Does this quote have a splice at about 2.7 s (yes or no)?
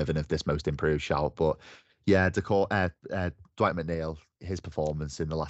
no